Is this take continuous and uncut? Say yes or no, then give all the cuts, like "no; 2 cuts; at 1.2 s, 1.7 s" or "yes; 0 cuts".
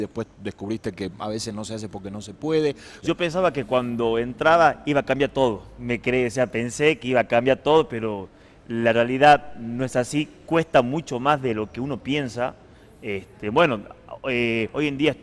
no; 1 cut; at 3.0 s